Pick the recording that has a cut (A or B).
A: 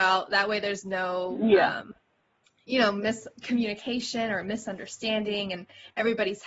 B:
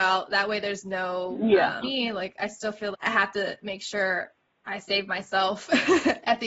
B